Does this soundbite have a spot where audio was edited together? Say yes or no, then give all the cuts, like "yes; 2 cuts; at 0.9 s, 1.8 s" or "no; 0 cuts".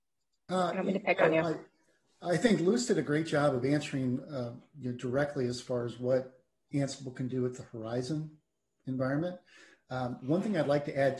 no; 0 cuts